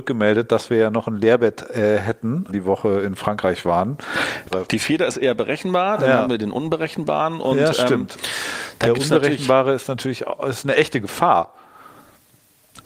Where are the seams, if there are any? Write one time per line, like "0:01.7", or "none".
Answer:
0:02.5
0:04.5